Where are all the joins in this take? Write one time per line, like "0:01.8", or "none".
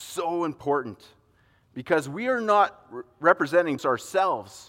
0:03.8